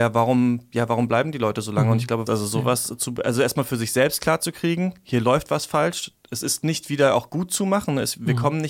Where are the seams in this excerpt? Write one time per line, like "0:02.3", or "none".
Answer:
0:02.3